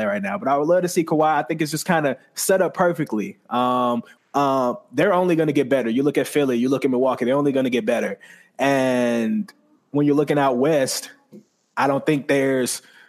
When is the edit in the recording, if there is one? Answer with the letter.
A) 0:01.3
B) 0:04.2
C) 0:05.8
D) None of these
B